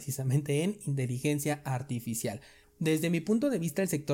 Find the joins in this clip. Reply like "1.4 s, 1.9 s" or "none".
2.6 s